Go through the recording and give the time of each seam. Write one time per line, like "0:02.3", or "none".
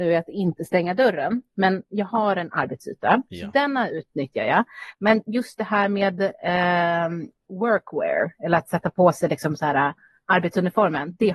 none